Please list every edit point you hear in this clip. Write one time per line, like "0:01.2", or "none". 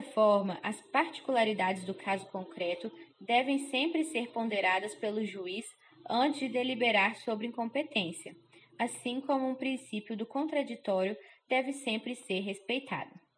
none